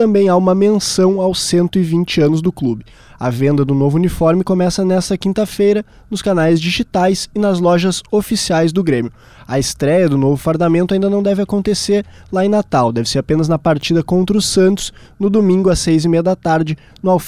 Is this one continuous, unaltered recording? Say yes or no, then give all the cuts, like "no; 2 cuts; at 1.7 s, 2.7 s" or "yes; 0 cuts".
yes; 0 cuts